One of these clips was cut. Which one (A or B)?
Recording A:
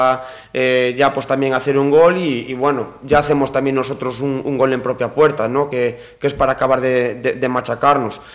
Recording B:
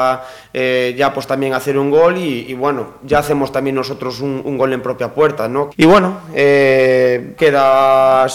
B